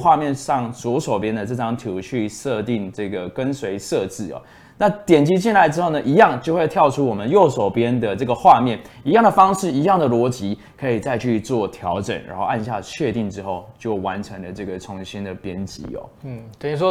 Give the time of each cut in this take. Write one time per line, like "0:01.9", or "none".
none